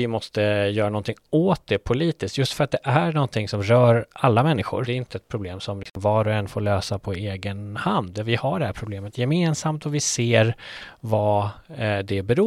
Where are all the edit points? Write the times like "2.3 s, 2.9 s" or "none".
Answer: 4.8 s